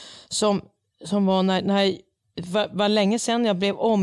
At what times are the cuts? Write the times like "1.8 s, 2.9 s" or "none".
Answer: none